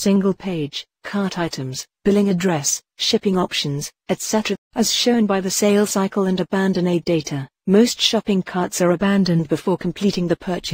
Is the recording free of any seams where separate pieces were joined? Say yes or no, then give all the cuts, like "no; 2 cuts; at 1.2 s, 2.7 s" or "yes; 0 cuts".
no; 1 cut; at 4.6 s